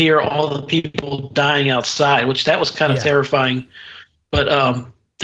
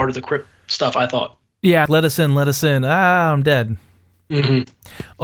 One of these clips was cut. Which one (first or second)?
second